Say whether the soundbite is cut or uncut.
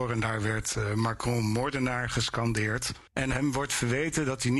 cut